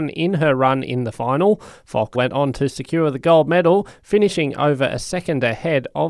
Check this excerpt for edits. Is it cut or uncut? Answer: cut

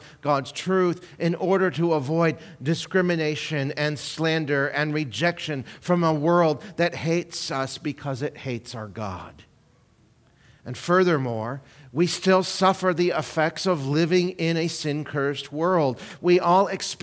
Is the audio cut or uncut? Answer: uncut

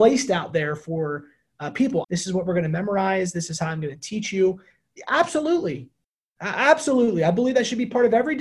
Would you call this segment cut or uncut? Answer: cut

